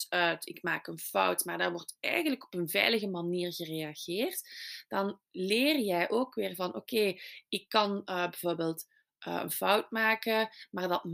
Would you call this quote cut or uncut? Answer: uncut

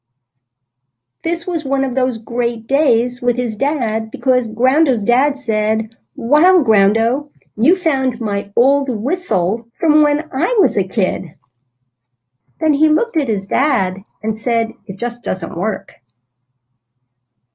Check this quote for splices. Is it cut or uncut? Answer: cut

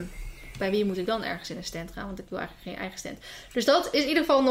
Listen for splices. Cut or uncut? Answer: uncut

